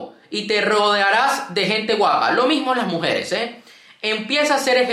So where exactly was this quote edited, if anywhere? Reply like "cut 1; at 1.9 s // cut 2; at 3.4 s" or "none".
none

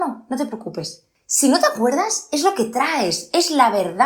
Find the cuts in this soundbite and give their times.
none

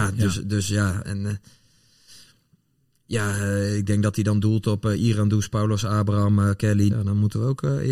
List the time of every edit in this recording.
cut 1; at 1.0 s // cut 2; at 6.9 s

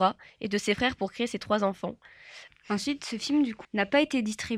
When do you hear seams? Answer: cut 1; at 2.5 s // cut 2; at 3.6 s

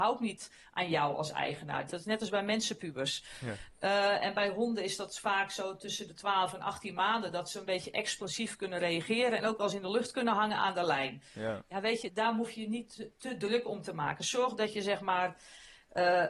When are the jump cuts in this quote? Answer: cut 1; at 1.9 s

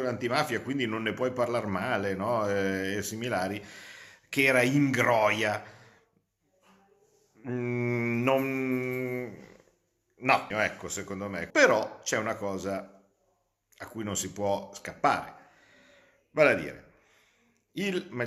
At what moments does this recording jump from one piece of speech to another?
cut 1; at 10.5 s // cut 2; at 11.5 s

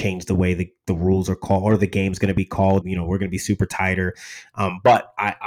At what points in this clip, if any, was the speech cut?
cut 1; at 2.8 s

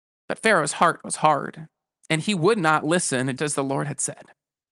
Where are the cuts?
cut 1; at 3.4 s

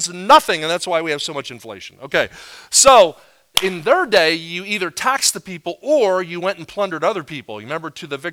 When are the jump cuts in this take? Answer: cut 1; at 3.5 s

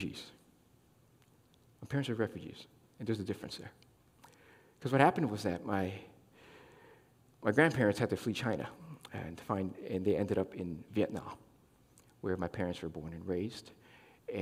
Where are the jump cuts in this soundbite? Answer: none

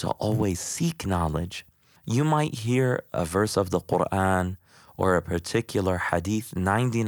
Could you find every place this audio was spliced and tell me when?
none

